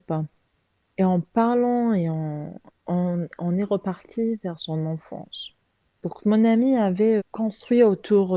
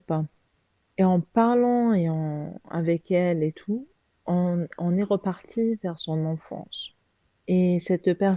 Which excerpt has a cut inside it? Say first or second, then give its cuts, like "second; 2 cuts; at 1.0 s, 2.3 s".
first; 3 cuts; at 2.7 s, 6.0 s, 7.2 s